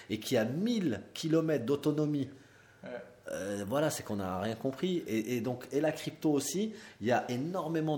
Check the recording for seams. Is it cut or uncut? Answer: uncut